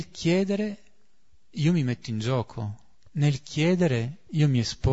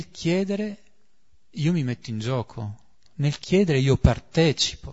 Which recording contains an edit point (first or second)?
second